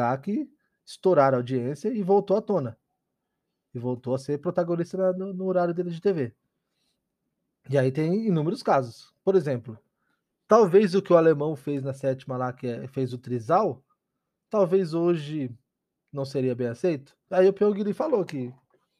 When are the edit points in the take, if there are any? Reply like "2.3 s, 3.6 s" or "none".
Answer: 17.3 s